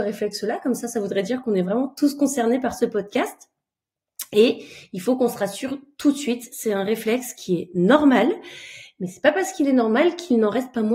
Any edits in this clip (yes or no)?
no